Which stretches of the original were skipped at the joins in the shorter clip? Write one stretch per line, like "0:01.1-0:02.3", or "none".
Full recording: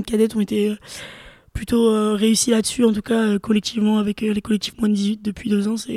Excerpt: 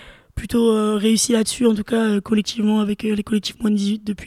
none